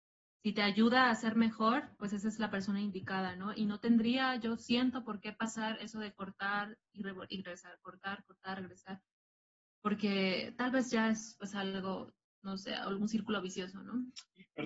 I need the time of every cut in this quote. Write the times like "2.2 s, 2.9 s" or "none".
none